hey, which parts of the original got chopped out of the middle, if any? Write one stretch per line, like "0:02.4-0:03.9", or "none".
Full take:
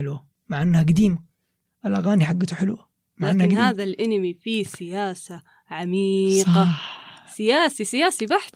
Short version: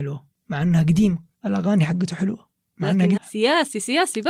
0:01.3-0:01.7
0:03.6-0:07.2